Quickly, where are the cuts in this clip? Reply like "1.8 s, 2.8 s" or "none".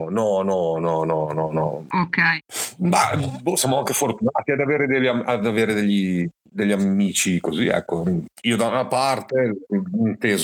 none